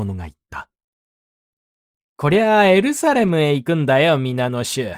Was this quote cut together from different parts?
yes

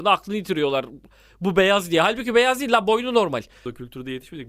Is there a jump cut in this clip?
no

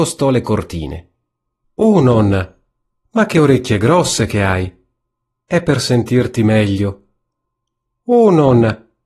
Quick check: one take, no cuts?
no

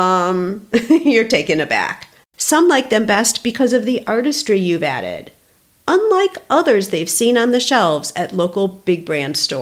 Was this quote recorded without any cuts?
no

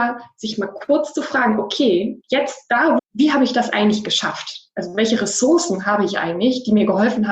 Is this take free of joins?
no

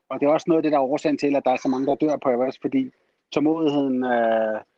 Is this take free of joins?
yes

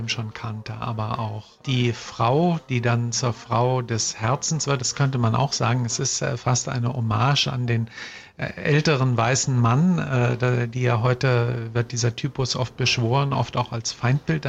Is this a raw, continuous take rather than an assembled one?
no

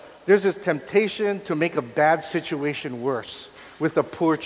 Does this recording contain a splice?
no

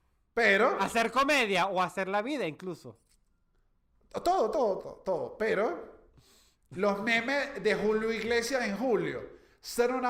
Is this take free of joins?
no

